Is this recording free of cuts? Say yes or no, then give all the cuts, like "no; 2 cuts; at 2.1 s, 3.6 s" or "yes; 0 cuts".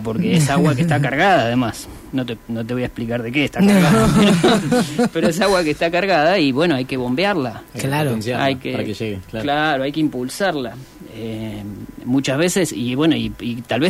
yes; 0 cuts